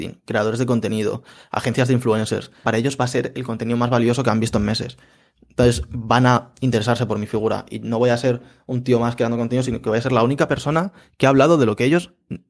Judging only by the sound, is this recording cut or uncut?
cut